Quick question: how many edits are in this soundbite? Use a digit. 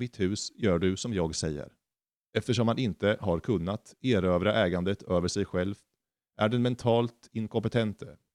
1